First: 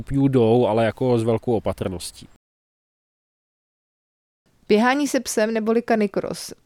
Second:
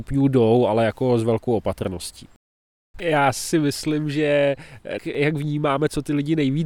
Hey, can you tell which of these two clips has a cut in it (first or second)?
second